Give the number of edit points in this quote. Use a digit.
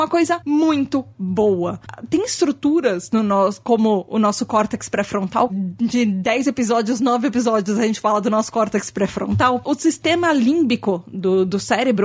1